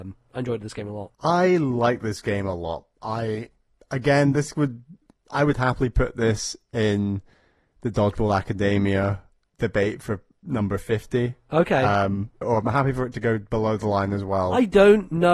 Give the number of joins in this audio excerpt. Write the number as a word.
two